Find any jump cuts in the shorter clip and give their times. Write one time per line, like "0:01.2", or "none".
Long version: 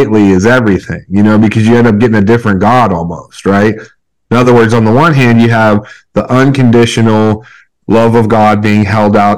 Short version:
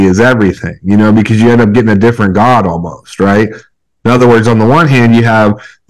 none